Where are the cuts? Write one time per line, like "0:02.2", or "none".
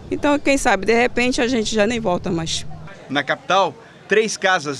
none